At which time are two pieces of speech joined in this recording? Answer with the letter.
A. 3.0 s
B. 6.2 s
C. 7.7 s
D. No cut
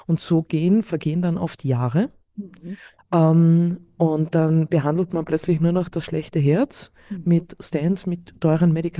A